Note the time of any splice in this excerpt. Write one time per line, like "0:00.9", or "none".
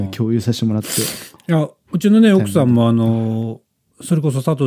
0:01.3